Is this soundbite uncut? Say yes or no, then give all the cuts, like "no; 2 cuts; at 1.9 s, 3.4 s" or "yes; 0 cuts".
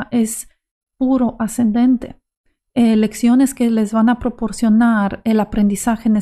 no; 1 cut; at 2.6 s